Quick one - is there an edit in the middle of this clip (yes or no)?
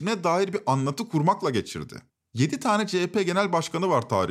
no